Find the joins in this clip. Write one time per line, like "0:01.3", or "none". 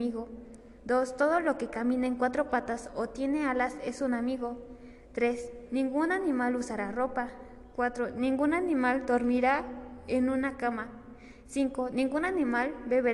none